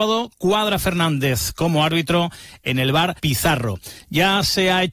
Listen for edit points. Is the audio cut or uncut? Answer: cut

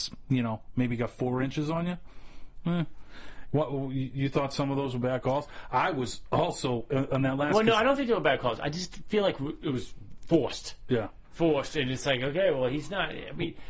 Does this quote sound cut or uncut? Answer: uncut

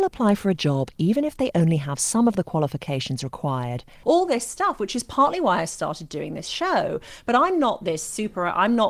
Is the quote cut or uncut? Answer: cut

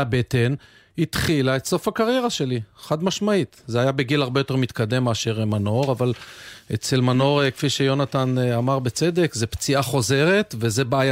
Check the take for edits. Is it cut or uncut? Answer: uncut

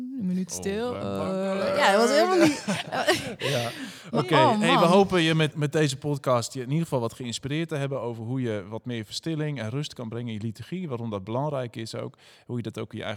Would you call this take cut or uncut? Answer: cut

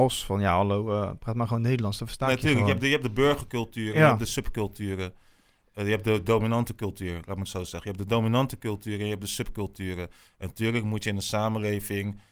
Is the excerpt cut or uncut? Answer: uncut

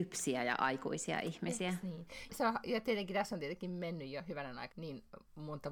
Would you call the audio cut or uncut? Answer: cut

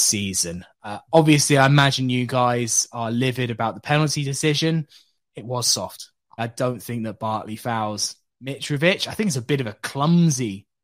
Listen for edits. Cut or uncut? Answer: cut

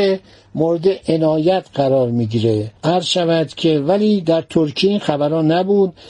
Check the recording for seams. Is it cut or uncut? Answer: cut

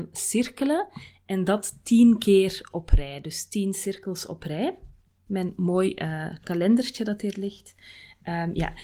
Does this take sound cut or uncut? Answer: cut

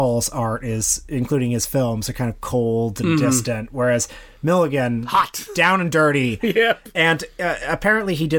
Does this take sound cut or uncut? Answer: uncut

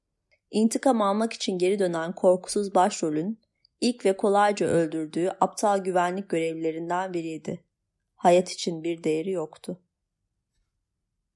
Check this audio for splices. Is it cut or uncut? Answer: uncut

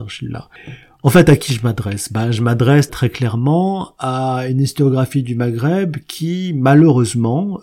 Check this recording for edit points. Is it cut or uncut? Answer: cut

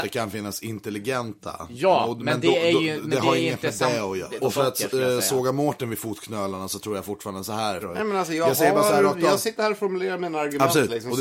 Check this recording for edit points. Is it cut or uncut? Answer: cut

